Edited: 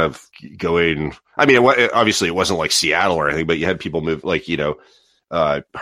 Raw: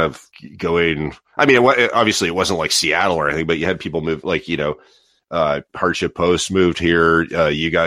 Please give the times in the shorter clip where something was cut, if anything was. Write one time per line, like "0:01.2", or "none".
none